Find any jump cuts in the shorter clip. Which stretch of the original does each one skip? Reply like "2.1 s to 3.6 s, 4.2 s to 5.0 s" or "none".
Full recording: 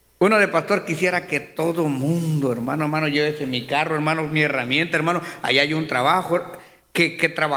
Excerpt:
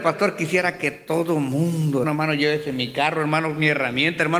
2.5 s to 2.8 s